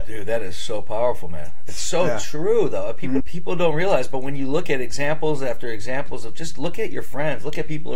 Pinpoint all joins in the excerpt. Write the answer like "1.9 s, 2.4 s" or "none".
3.2 s